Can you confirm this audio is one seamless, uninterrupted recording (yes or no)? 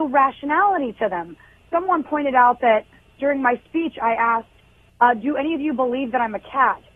yes